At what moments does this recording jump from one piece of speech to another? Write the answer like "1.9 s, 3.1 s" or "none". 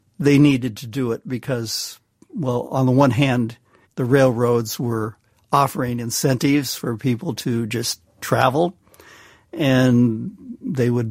3.8 s